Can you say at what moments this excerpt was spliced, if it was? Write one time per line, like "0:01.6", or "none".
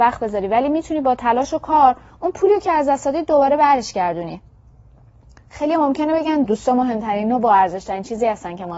0:06.4